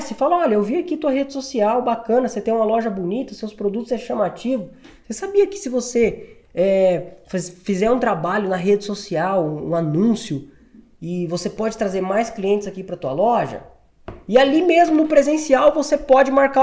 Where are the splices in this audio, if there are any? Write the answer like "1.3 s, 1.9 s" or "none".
none